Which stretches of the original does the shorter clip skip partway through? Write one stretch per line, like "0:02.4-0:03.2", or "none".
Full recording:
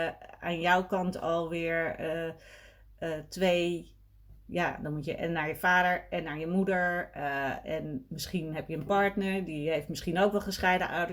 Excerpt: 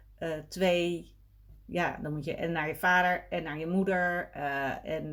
none